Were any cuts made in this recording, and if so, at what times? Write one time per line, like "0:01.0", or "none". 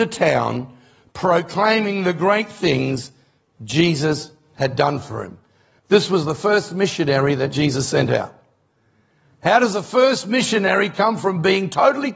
none